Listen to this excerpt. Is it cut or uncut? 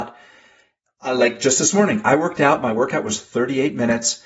uncut